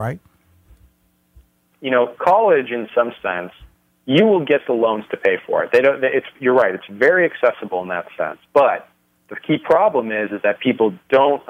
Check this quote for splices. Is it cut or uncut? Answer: cut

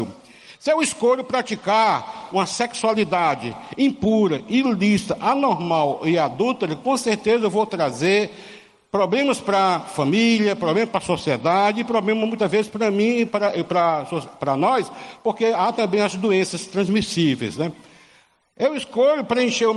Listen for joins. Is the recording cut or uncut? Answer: uncut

